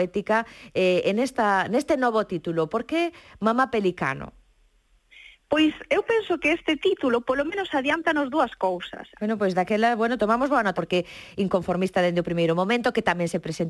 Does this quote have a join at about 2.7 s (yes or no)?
no